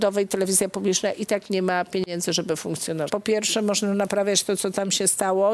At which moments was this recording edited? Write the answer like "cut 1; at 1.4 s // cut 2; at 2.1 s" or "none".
cut 1; at 3.1 s